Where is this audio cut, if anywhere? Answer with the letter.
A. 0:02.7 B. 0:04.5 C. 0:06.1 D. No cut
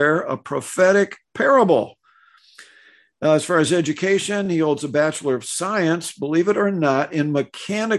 D